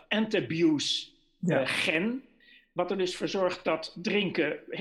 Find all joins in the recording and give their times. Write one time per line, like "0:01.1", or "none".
none